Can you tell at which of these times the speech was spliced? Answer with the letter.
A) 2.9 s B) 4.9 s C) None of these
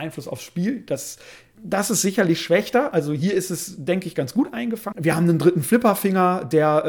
B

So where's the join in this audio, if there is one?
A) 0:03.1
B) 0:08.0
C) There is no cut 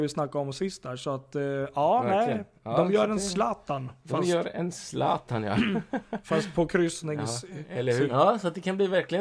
B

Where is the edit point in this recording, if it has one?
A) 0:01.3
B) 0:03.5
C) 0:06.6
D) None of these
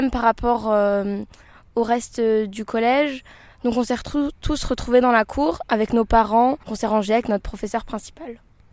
C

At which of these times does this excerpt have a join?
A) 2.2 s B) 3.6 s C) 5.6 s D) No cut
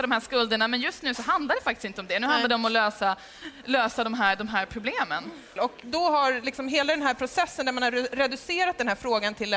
C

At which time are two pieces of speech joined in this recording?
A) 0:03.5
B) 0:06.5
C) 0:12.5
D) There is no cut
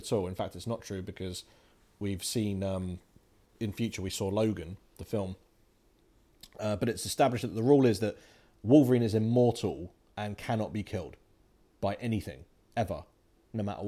A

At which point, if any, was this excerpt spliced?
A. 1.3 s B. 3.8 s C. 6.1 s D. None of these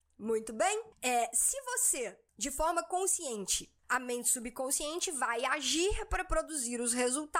B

